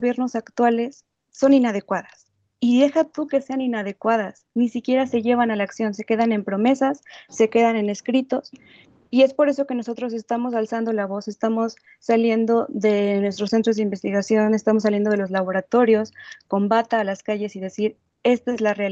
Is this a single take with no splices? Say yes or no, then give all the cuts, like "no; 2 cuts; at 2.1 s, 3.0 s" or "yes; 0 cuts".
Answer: yes; 0 cuts